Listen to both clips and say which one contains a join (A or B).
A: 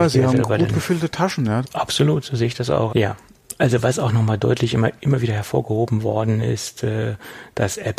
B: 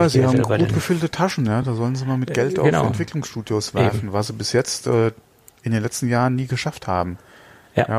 A